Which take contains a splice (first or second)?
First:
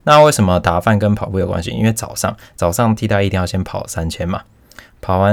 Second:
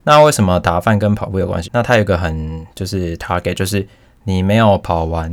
second